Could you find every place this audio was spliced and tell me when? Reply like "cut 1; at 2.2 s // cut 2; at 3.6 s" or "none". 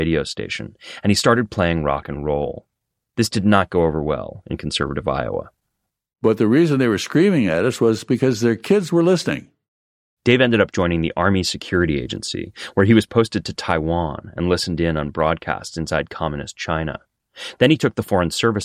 none